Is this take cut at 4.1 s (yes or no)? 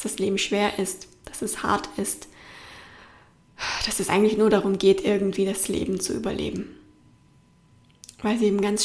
no